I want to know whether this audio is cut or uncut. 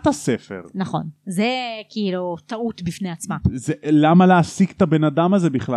uncut